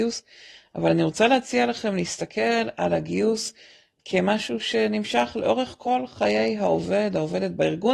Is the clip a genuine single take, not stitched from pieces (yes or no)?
no